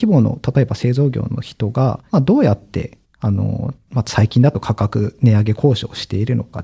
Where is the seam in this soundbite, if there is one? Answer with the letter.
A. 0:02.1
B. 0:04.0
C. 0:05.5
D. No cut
A